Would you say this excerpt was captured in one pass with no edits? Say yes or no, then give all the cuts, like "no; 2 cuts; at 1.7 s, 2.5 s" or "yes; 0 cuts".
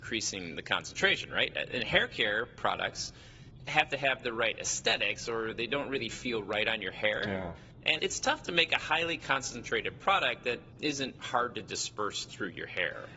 no; 1 cut; at 8.0 s